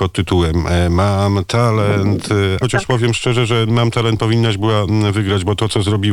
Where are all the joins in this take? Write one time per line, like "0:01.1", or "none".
0:02.6

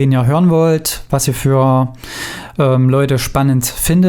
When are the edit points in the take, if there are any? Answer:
none

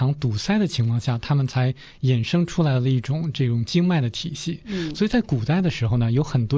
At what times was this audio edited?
none

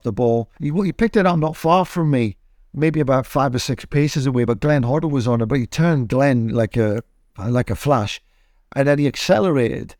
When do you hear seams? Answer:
none

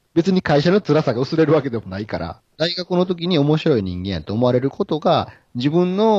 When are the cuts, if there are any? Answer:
0:02.6

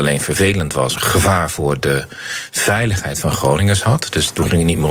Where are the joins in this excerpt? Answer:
0:01.0

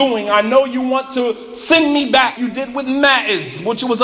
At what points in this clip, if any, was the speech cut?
0:02.4

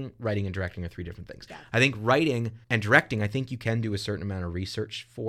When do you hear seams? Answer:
0:02.6

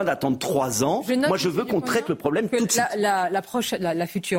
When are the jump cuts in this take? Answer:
none

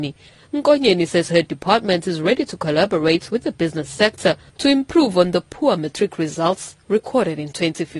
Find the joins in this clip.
none

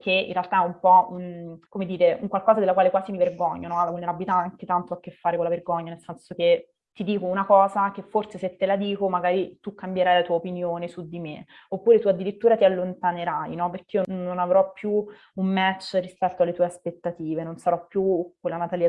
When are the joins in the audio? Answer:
0:01.6

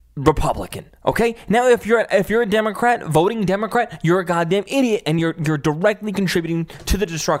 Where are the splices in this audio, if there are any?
none

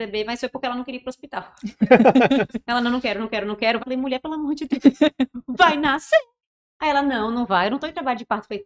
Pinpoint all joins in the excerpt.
0:03.8

